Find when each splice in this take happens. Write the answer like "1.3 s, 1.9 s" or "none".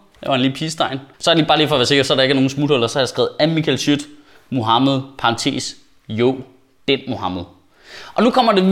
1.1 s